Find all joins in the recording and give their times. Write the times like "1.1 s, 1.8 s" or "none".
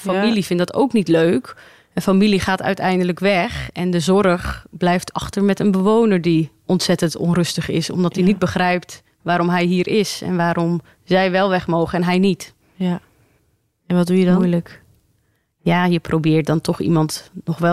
none

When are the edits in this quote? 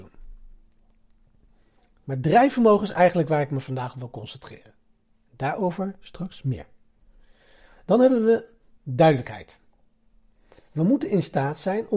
none

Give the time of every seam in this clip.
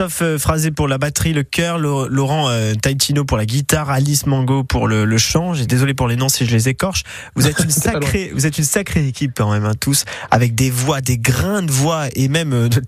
none

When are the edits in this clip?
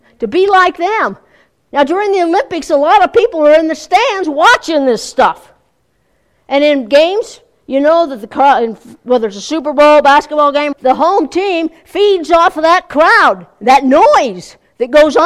1.7 s, 10.7 s

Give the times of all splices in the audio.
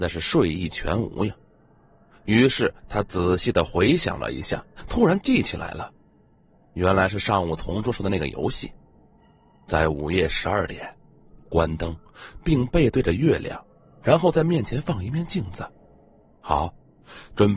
none

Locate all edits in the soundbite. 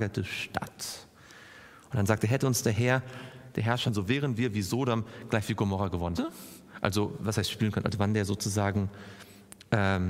3.9 s, 6.1 s

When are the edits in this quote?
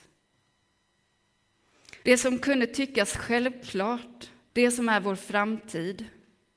2.0 s, 4.5 s

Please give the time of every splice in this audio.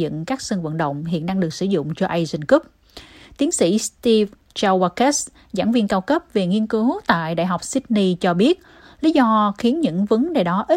none

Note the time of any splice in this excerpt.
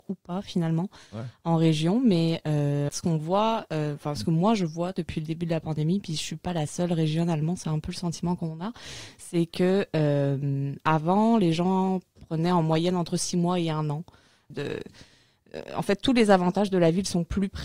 2.9 s, 14.5 s

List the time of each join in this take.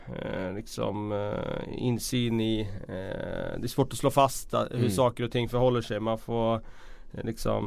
none

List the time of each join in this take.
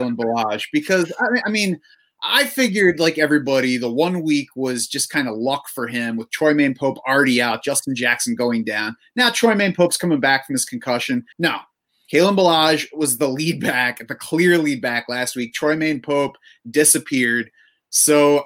11.3 s

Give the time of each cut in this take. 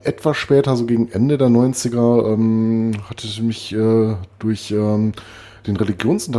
none

